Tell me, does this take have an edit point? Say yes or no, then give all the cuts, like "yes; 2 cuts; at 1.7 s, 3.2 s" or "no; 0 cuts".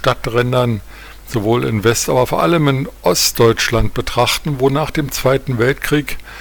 no; 0 cuts